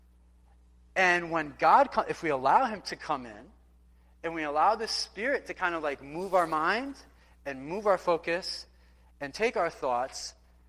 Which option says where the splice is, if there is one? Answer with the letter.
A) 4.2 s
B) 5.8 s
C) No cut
C